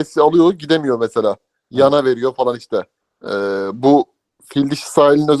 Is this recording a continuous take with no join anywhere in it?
no; 1 cut; at 3.0 s

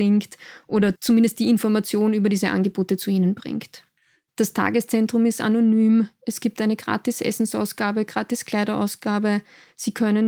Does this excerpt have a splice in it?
yes; 1 cut; at 4.3 s

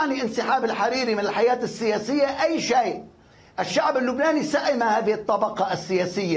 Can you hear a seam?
no; 0 cuts

